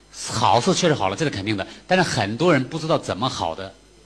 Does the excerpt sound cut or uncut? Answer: uncut